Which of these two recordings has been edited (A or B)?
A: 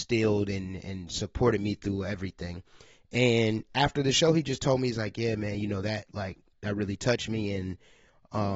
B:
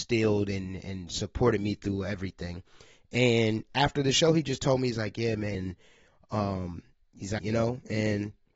B